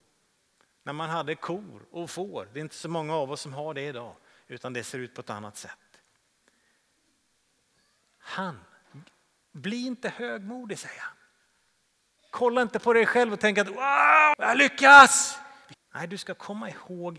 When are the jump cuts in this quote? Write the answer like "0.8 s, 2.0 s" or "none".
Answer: 14.3 s, 15.7 s